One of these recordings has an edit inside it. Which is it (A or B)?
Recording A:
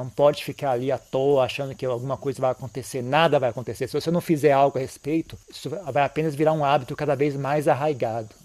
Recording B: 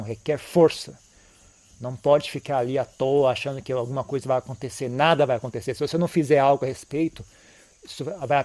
A